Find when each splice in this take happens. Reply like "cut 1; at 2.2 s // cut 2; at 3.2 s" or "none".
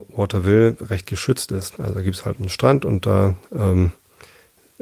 cut 1; at 1.8 s

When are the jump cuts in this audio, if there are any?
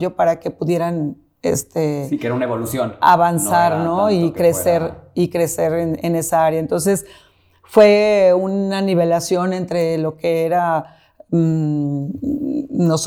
none

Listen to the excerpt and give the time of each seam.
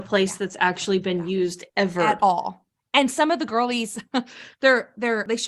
none

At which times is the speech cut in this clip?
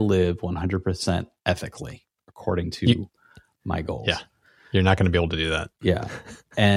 none

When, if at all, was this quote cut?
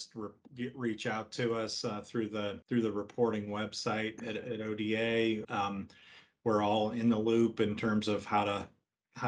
cut 1; at 2.6 s // cut 2; at 5.4 s

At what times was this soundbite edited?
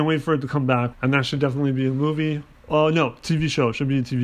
cut 1; at 0.9 s

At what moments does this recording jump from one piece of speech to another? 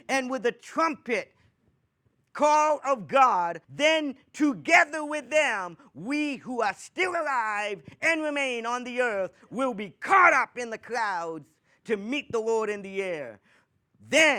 cut 1; at 3.6 s

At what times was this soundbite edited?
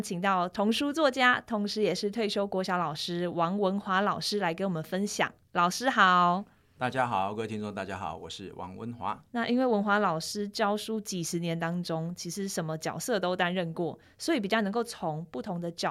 cut 1; at 9.3 s

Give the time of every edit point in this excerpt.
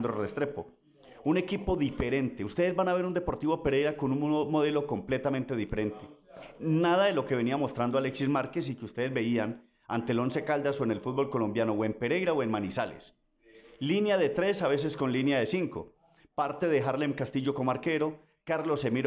none

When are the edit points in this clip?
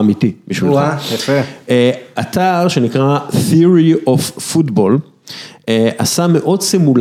none

